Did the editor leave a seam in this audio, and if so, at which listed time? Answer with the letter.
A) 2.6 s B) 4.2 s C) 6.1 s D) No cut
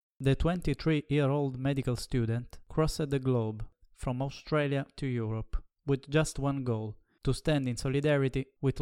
D